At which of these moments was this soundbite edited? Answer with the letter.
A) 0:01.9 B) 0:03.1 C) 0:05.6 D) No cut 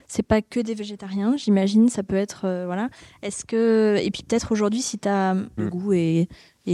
C